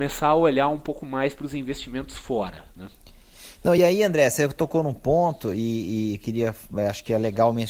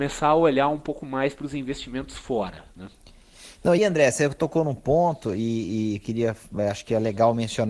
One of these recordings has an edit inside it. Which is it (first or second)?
second